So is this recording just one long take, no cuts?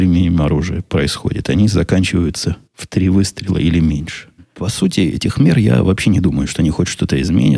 no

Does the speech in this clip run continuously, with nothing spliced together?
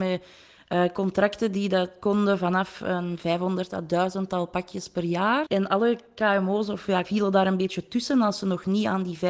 no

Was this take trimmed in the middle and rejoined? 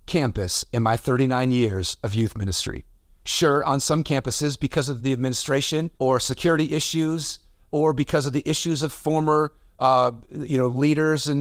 yes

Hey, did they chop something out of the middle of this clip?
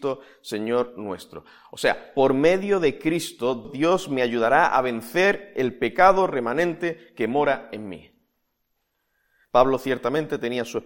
yes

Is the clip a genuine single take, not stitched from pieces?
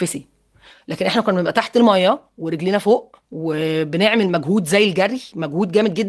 no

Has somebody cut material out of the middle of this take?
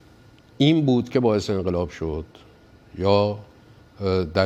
no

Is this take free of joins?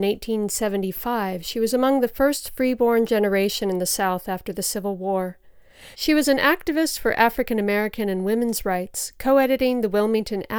no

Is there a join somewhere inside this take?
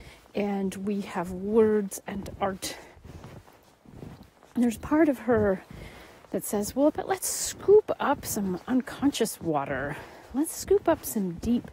yes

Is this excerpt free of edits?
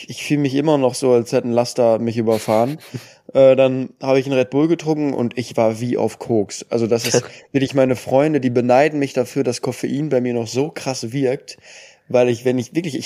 yes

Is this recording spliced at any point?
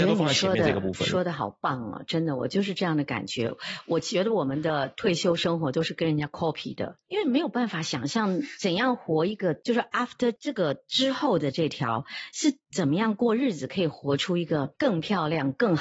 no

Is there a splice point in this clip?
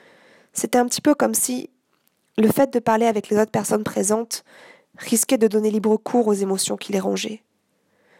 no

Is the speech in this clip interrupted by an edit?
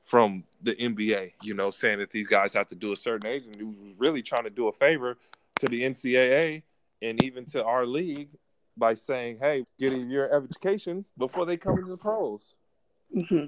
yes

